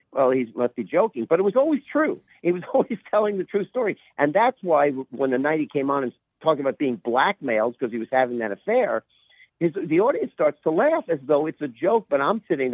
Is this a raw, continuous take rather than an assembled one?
yes; 0 cuts

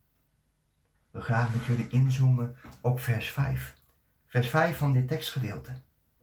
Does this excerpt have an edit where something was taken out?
yes; 1 cut; at 0.9 s

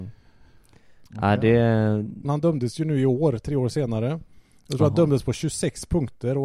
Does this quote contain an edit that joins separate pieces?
yes; 1 cut; at 2.2 s

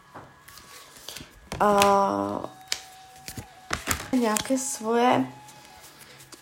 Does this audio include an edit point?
yes; 1 cut; at 4.1 s

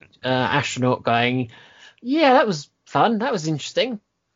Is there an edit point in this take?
no; 0 cuts

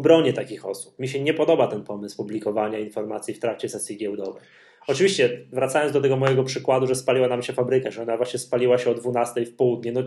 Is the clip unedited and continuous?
yes; 0 cuts

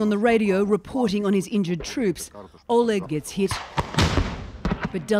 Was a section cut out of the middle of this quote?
yes; 1 cut; at 3.1 s

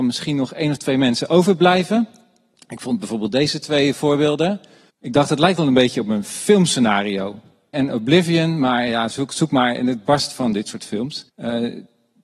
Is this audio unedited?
no; 3 cuts; at 4.9 s, 7.7 s, 11.3 s

